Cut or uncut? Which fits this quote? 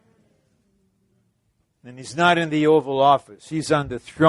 cut